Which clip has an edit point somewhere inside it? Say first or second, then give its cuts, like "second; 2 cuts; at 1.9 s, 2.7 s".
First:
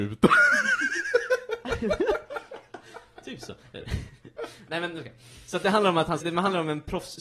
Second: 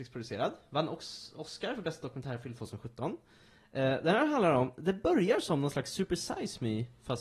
first; 1 cut; at 6.2 s